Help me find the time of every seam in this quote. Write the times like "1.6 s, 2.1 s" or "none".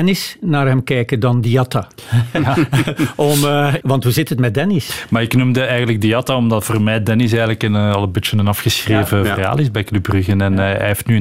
3.8 s